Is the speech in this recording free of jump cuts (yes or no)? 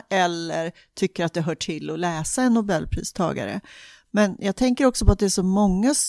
yes